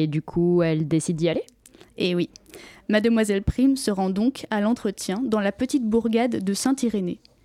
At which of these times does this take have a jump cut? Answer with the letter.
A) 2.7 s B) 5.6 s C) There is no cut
C